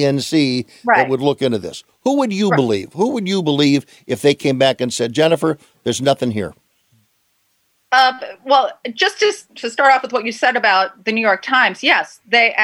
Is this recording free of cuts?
yes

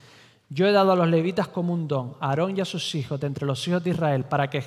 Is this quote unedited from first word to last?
yes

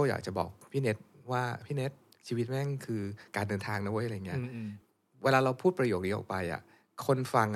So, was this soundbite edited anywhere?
no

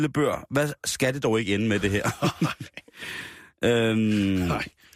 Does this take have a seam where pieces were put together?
no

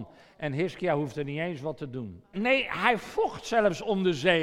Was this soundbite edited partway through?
yes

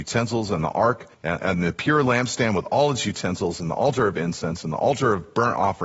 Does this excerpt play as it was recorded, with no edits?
no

